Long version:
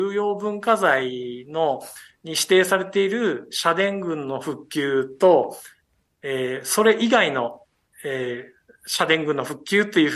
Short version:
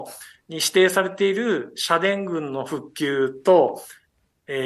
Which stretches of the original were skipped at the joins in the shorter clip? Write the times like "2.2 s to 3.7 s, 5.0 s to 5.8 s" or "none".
none